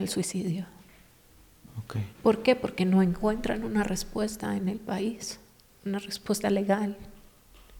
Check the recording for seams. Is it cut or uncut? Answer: cut